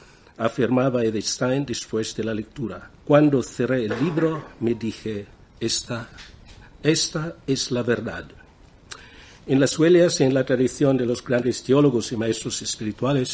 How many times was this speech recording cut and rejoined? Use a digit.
1